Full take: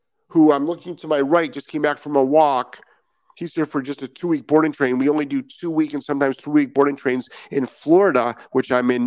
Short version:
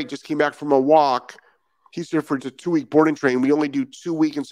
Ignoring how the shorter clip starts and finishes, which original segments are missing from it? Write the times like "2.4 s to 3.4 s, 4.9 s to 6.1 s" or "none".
3.8 s to 4.0 s